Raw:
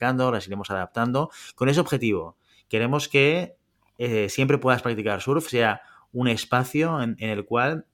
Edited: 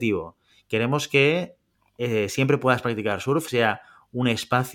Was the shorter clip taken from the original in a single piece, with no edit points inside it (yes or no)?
yes